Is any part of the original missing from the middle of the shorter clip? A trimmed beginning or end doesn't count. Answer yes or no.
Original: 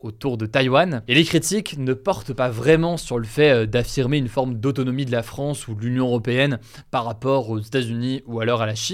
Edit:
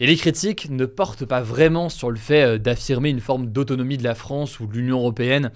no